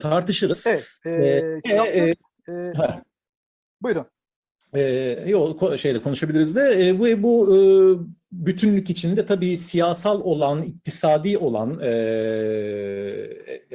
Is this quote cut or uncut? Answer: uncut